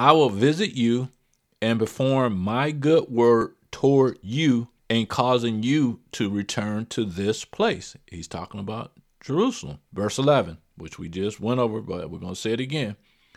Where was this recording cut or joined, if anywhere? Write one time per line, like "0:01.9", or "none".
0:09.9